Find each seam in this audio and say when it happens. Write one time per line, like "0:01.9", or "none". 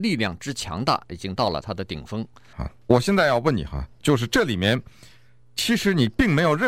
0:02.5